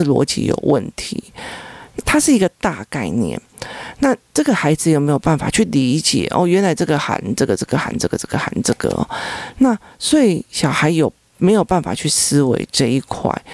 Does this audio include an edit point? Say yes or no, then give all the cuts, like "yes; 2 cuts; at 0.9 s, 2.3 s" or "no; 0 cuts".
yes; 1 cut; at 2.0 s